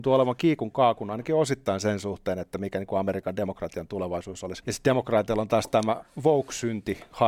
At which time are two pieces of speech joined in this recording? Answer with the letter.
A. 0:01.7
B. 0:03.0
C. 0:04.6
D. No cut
C